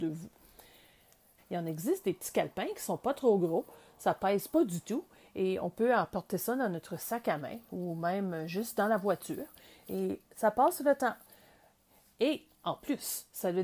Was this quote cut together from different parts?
yes; 1 cut; at 1.4 s

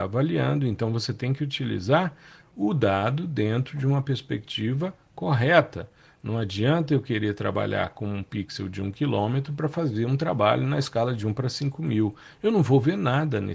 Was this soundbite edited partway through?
no; 0 cuts

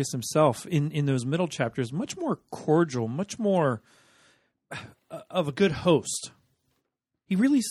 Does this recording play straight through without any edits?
yes; 0 cuts

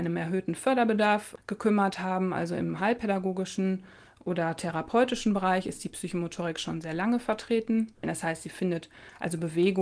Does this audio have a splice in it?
yes; 1 cut; at 8.0 s

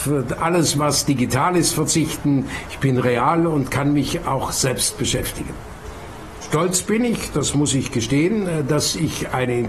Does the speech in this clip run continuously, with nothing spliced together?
no; 1 cut; at 6.4 s

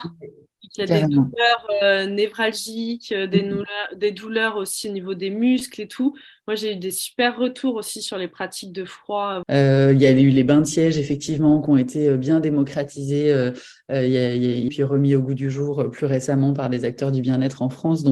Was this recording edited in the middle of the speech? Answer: yes; 2 cuts; at 9.4 s, 14.7 s

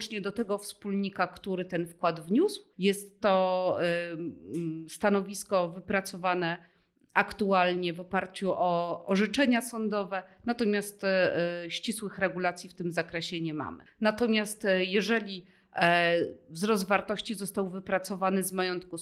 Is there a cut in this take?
yes; 2 cuts; at 2.7 s, 13.9 s

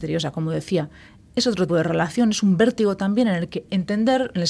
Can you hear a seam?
yes; 1 cut; at 1.7 s

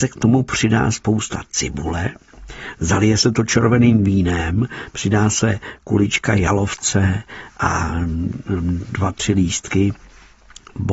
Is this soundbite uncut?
yes; 0 cuts

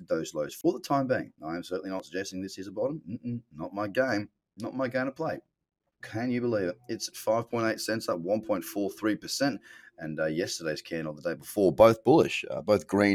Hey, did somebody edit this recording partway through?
yes; 1 cut; at 6.0 s

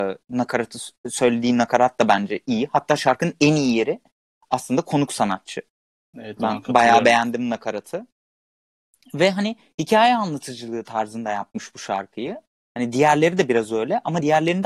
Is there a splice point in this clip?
no; 0 cuts

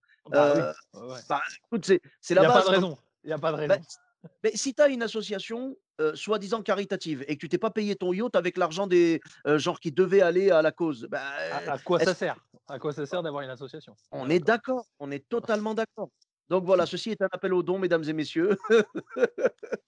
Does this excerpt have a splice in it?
no; 0 cuts

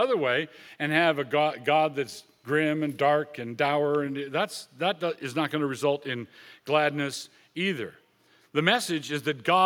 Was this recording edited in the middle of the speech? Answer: no; 0 cuts

